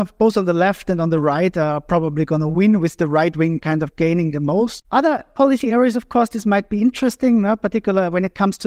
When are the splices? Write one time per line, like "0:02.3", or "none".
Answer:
0:04.8